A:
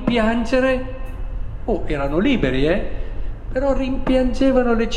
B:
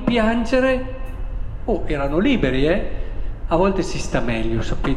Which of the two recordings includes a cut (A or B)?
B